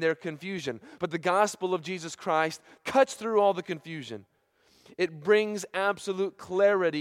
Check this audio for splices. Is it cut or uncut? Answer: uncut